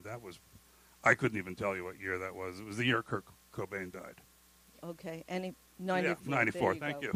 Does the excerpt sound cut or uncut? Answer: uncut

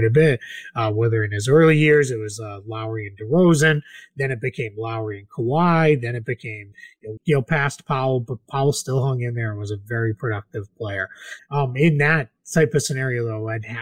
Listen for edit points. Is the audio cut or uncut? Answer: cut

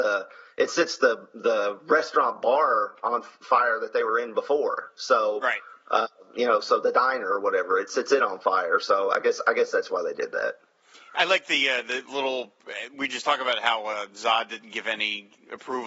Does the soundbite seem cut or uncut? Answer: uncut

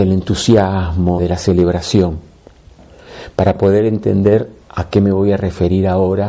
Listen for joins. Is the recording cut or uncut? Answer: cut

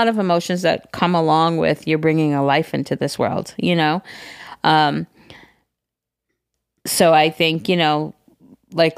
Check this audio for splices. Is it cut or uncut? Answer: uncut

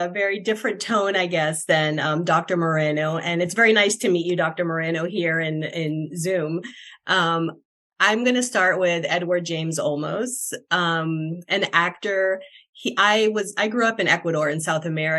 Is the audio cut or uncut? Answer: uncut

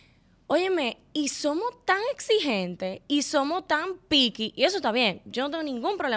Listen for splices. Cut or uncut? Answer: uncut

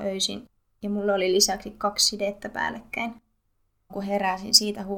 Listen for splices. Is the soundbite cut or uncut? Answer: cut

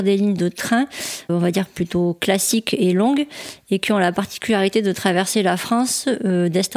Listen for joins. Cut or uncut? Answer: cut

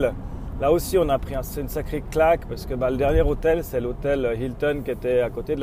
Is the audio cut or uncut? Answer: uncut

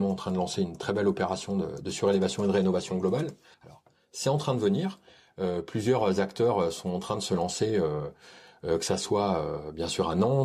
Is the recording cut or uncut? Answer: cut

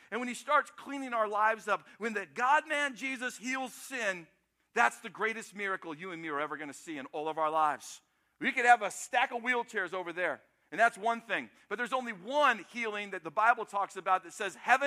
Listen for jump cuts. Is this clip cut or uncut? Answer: uncut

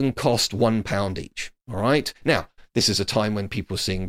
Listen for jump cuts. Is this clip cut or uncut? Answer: uncut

